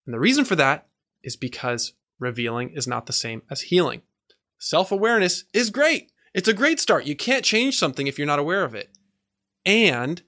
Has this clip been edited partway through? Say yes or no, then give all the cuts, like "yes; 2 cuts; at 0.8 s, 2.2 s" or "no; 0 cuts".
no; 0 cuts